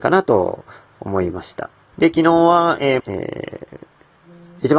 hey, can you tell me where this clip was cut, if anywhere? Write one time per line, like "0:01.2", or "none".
0:01.9
0:03.0